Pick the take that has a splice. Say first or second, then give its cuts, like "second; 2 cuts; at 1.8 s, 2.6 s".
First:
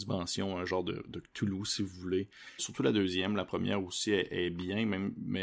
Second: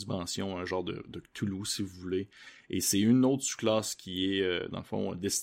first; 1 cut; at 2.6 s